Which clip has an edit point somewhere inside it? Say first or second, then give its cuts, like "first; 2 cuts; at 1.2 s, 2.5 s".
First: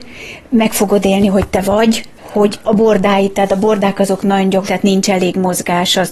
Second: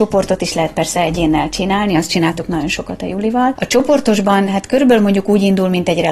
first; 2 cuts; at 2.6 s, 4.7 s